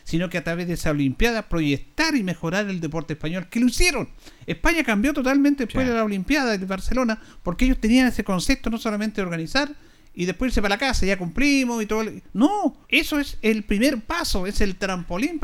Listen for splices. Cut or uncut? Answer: cut